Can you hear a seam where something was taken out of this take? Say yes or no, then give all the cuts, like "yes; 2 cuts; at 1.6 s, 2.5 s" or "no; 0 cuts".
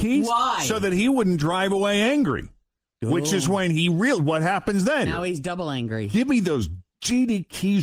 yes; 1 cut; at 5.1 s